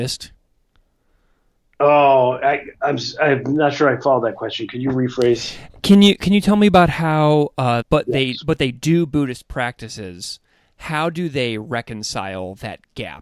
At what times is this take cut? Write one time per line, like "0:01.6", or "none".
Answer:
0:07.8